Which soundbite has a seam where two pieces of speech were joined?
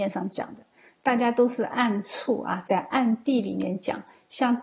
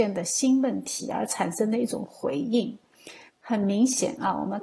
second; 1 cut; at 3.3 s

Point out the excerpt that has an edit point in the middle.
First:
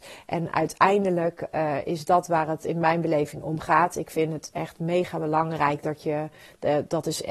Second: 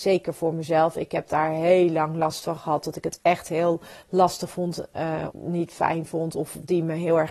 second; 1 cut; at 5.3 s

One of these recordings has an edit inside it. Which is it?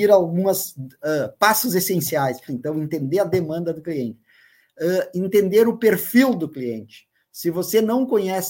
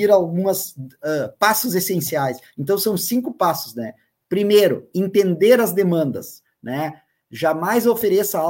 first; 1 cut; at 2.5 s

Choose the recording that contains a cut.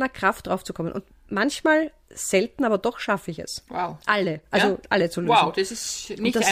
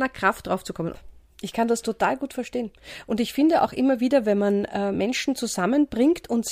second; 1 cut; at 0.9 s

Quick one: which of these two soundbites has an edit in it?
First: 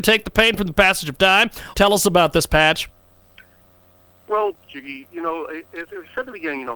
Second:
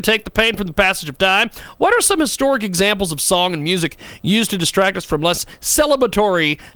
first; 2 cuts; at 1.7 s, 4.7 s

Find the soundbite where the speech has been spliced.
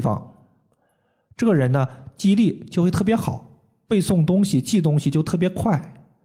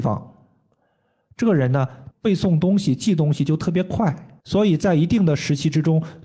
second; 2 cuts; at 2.1 s, 4.4 s

